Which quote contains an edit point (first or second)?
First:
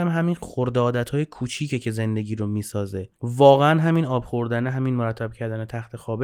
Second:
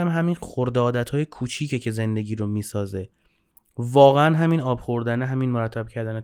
first